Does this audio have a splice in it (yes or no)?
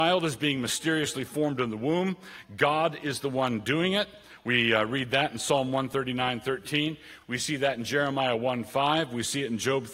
no